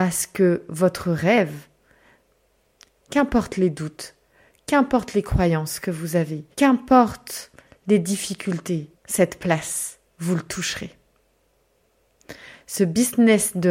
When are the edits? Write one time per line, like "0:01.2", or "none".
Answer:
0:06.5
0:08.9
0:10.1